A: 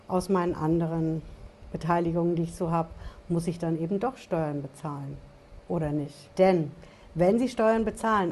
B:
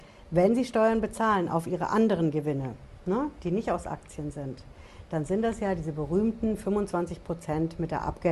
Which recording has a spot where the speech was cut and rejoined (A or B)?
A